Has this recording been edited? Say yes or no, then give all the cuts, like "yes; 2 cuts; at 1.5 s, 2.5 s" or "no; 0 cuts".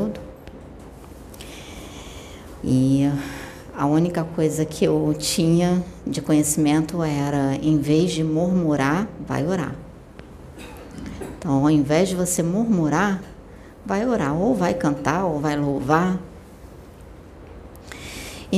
yes; 1 cut; at 2.6 s